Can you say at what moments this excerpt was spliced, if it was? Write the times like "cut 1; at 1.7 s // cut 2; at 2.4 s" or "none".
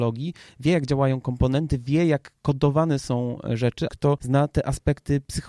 cut 1; at 3.9 s

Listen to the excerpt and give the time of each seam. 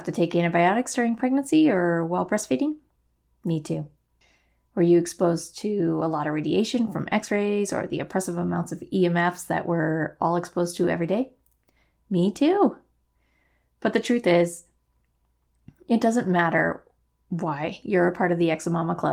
none

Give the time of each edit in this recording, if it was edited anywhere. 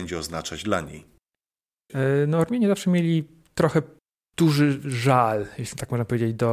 none

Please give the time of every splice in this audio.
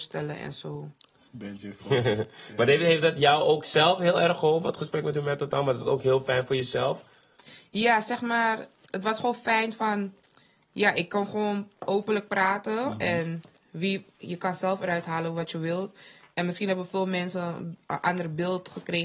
cut 1; at 8.8 s

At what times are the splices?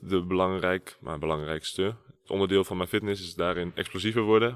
none

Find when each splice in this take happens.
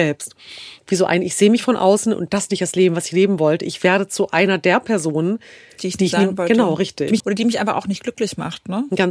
cut 1; at 7.2 s

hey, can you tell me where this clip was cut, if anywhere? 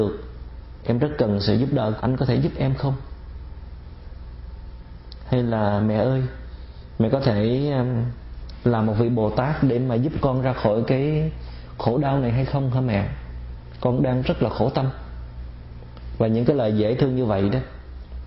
cut 1; at 2.0 s

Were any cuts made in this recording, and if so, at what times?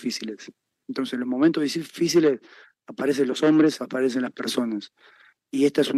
cut 1; at 3.8 s

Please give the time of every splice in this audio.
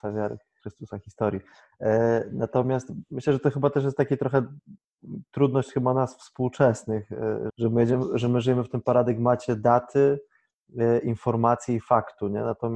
cut 1; at 7.5 s

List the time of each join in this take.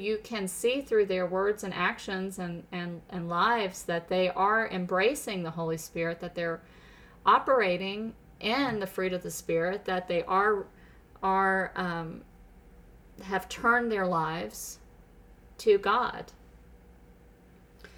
none

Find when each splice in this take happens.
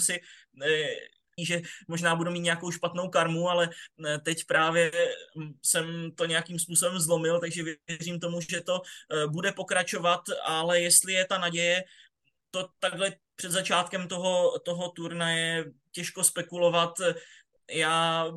cut 1; at 1.4 s

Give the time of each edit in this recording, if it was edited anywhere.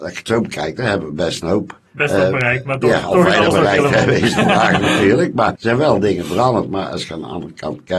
cut 1; at 1.9 s // cut 2; at 5.5 s

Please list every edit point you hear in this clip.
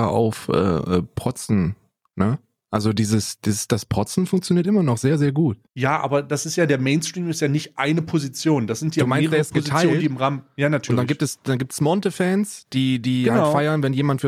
cut 1; at 5.7 s

